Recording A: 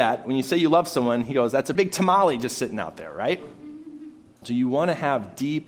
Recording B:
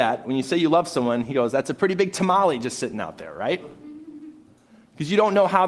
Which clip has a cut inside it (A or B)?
A